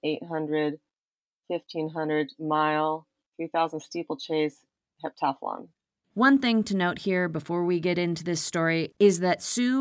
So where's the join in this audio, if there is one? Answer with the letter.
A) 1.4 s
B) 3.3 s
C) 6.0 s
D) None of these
C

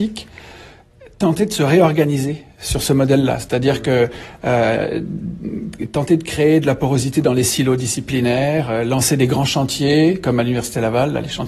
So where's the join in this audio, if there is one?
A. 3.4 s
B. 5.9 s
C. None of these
C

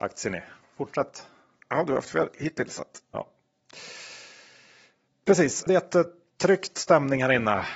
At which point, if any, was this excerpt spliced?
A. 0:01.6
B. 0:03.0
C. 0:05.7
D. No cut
C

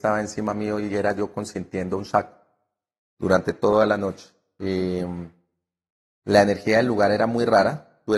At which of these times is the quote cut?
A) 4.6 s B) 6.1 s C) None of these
C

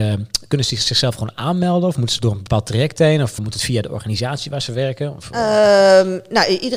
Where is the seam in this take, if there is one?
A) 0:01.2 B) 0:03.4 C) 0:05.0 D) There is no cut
B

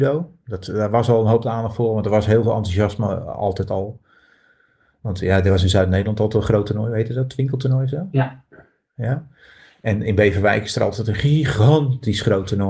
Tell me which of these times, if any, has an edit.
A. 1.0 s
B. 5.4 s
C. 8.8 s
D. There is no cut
D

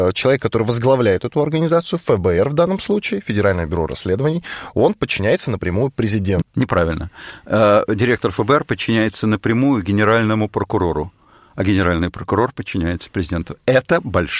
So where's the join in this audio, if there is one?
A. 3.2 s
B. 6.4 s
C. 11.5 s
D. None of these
B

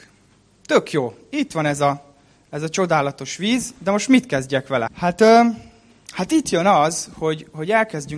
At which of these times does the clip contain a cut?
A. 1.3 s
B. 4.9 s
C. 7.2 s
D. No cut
B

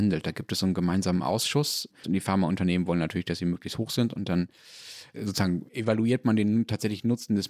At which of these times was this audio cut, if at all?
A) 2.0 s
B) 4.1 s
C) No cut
A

